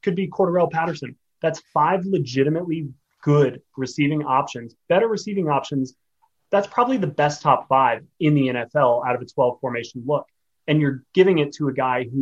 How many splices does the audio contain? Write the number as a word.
one